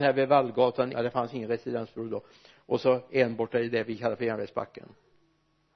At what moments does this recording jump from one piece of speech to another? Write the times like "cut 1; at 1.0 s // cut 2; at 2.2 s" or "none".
cut 1; at 0.9 s